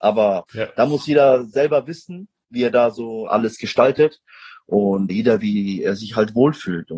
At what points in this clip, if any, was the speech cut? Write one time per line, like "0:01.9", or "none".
0:03.3
0:05.1